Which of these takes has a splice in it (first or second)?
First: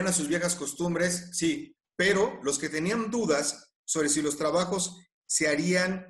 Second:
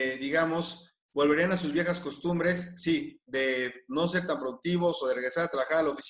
first